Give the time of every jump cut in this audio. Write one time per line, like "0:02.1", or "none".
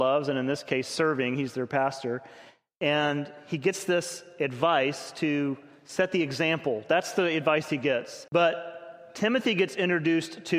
0:08.3